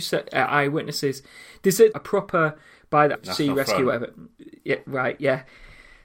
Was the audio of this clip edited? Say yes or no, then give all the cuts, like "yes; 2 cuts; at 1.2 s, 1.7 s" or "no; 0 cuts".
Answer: yes; 2 cuts; at 1.9 s, 3.1 s